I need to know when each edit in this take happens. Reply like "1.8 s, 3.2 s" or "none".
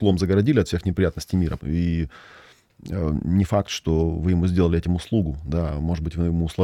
1.6 s